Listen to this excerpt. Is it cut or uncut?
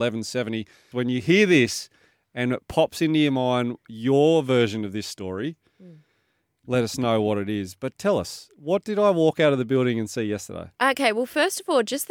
cut